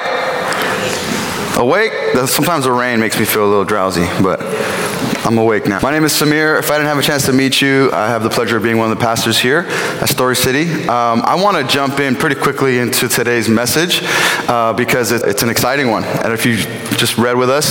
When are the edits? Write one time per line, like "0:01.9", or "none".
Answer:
0:05.8
0:15.2